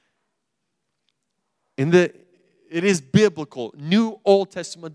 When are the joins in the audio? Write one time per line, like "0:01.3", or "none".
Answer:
none